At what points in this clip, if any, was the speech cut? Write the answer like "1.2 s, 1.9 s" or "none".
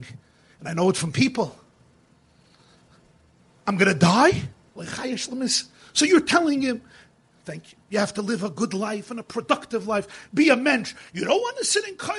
4.7 s